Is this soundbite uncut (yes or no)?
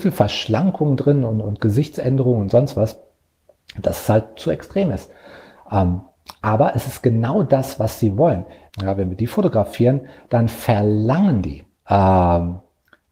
no